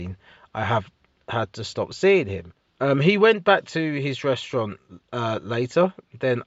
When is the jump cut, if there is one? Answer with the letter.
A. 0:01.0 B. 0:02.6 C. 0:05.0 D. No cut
B